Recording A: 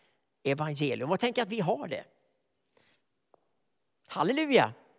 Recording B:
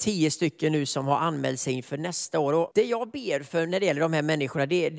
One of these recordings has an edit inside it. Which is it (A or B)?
B